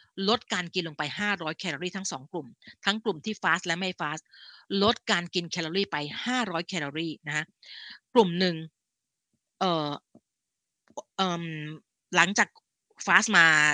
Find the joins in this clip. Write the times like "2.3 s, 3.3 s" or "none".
none